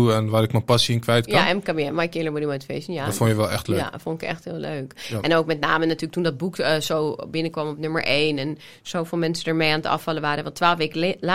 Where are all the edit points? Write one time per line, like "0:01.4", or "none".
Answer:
none